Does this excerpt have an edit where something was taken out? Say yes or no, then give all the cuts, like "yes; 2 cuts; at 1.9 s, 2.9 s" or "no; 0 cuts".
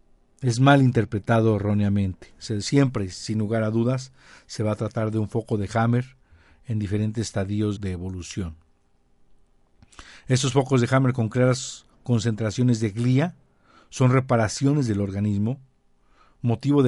yes; 1 cut; at 7.8 s